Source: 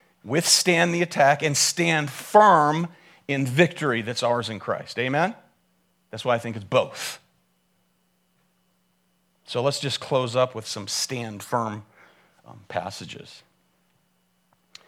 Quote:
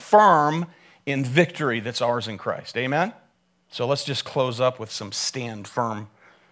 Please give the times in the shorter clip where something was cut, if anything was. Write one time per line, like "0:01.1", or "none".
0:03.6